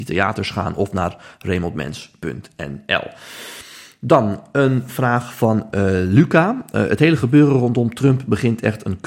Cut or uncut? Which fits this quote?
uncut